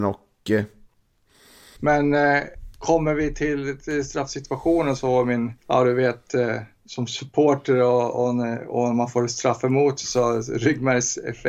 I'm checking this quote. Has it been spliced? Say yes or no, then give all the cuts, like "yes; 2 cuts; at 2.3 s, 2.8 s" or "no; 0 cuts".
yes; 2 cuts; at 1.8 s, 5.6 s